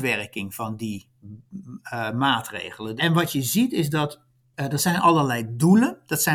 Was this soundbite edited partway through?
yes; 1 cut; at 3.0 s

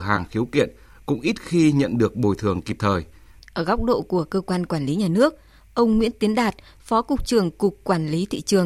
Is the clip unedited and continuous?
no; 1 cut; at 3.4 s

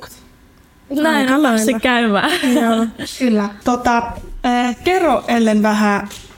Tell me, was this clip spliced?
yes; 1 cut; at 3.6 s

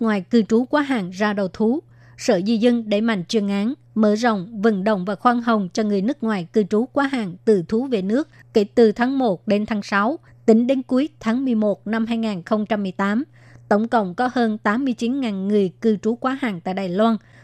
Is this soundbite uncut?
no; 1 cut; at 10.3 s

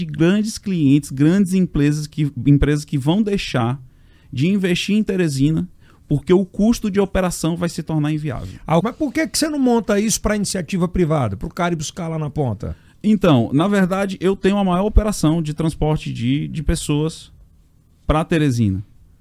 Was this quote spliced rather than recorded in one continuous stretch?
yes; 1 cut; at 8.8 s

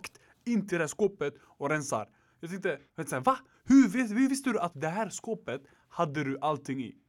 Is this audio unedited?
no; 2 cuts; at 2.9 s, 4.7 s

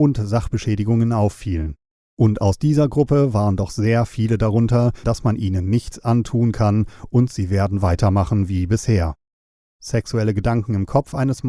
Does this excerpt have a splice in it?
yes; 2 cuts; at 5.0 s, 9.6 s

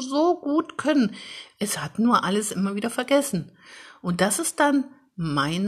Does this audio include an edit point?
yes; 1 cut; at 1.5 s

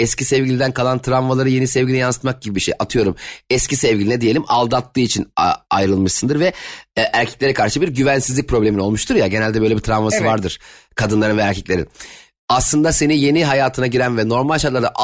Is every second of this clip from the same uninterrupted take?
yes; 0 cuts

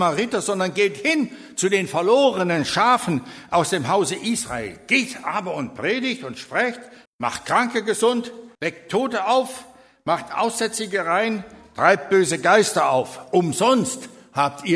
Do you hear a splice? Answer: yes; 2 cuts; at 7.1 s, 8.6 s

